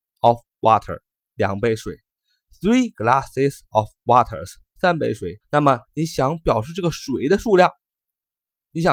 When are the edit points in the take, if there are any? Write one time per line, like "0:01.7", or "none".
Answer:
0:05.4